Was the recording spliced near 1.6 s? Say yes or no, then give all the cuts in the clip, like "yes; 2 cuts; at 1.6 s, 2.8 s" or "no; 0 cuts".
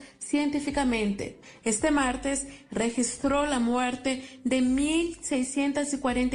yes; 1 cut; at 1.6 s